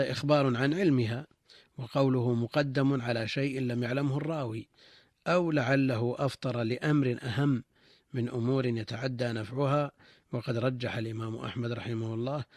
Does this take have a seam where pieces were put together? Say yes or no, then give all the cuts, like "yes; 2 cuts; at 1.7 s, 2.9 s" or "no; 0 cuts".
no; 0 cuts